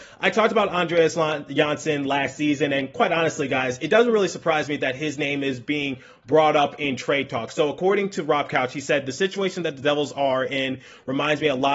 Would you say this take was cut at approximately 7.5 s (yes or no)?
no